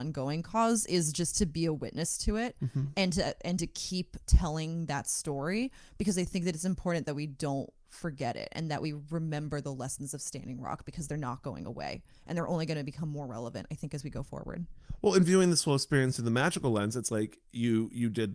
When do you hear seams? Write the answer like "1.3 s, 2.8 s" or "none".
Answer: none